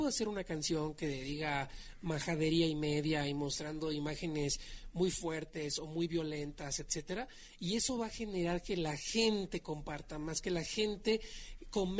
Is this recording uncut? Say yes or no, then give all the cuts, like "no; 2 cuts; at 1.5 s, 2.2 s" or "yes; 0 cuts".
yes; 0 cuts